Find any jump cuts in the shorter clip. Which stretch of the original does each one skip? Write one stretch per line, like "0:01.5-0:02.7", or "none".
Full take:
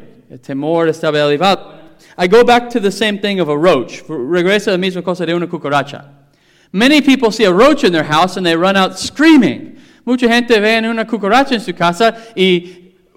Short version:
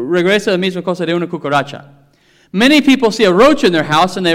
none